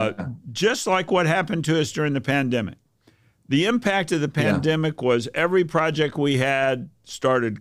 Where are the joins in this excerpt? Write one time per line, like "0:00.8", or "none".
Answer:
none